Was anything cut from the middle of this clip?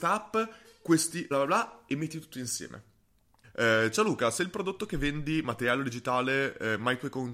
yes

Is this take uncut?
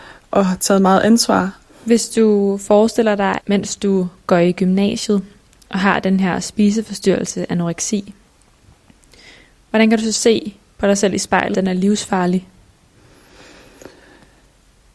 no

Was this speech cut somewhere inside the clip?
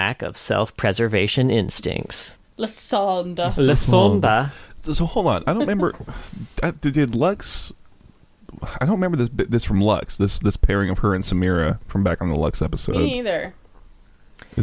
no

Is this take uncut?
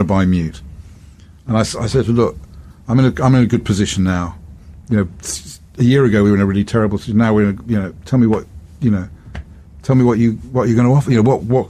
yes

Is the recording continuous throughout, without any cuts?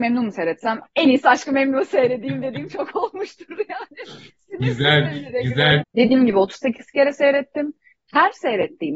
no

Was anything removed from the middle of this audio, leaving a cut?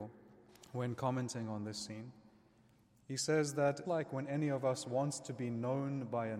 yes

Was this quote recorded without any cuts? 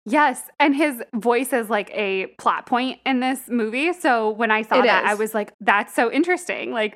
no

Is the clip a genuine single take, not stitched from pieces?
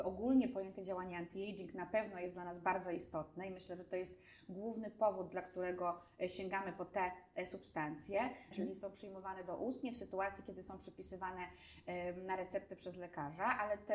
no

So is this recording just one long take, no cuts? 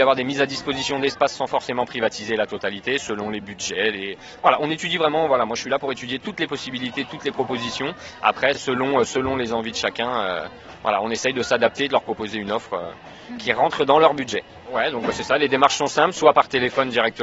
yes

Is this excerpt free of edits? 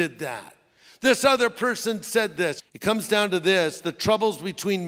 no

